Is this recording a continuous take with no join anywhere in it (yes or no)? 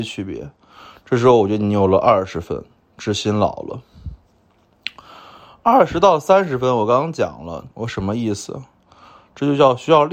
no